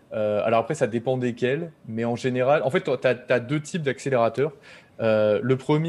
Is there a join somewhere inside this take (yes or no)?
no